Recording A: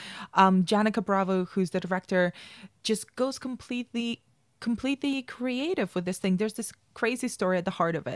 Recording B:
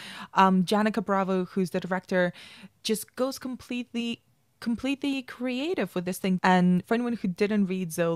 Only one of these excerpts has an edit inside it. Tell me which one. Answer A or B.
B